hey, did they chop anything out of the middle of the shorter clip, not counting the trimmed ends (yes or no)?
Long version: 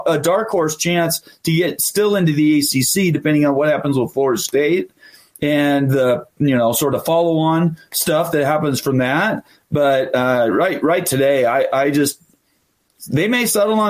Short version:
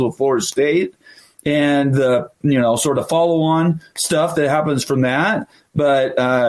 no